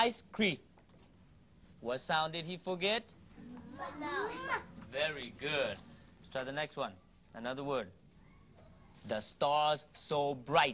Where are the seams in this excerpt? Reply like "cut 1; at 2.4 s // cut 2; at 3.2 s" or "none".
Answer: none